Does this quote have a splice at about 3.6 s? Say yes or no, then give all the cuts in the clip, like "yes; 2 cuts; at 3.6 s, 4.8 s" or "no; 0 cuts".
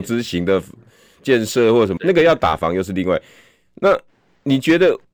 no; 1 cut; at 2.0 s